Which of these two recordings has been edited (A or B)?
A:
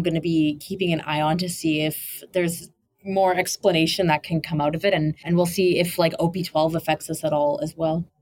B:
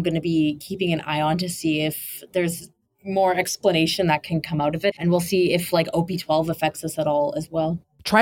B